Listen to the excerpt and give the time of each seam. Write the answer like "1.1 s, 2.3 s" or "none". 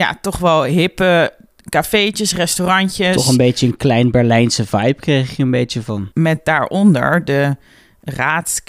6.1 s